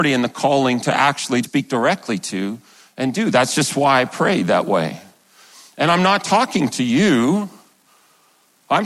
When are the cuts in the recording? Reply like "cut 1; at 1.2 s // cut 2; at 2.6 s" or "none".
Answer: cut 1; at 1.4 s